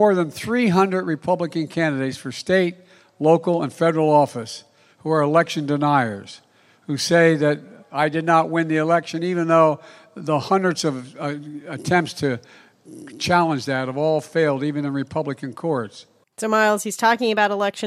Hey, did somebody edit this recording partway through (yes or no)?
no